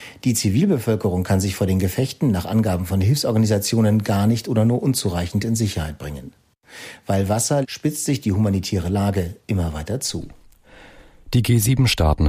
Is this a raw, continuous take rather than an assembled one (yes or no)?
no